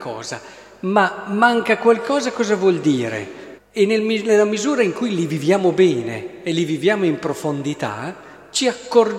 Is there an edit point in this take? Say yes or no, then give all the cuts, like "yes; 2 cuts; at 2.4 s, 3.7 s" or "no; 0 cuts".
yes; 1 cut; at 3.6 s